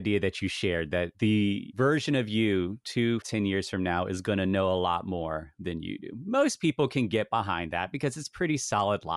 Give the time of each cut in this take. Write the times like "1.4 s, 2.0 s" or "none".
3.2 s